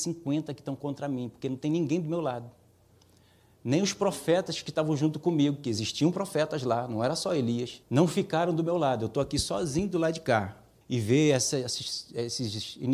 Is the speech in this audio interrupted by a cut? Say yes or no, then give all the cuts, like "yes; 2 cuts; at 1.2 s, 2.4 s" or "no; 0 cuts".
yes; 2 cuts; at 7.8 s, 10.8 s